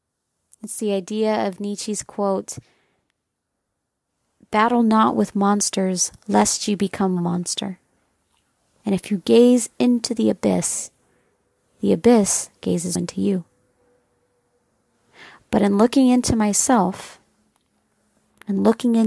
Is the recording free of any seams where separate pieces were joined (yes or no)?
no